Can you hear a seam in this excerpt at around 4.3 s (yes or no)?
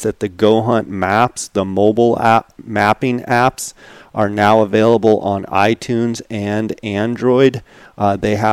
no